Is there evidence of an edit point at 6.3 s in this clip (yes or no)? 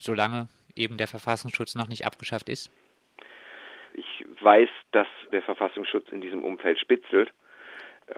no